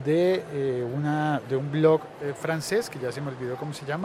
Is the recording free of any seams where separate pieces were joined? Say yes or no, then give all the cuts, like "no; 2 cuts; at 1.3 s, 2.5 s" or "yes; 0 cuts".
yes; 0 cuts